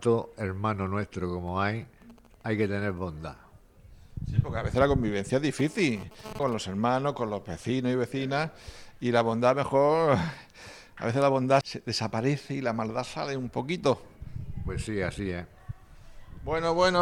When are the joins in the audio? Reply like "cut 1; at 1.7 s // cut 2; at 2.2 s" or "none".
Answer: cut 1; at 6.4 s // cut 2; at 11.6 s